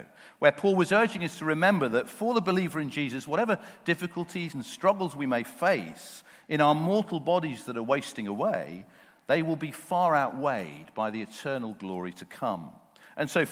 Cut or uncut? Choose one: cut